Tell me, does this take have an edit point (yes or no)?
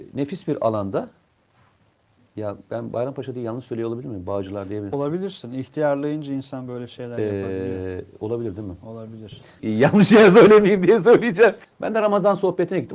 yes